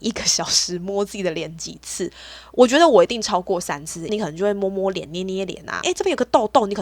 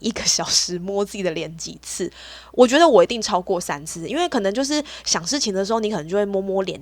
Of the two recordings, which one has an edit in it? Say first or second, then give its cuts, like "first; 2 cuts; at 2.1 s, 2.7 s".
first; 2 cuts; at 4.1 s, 5.8 s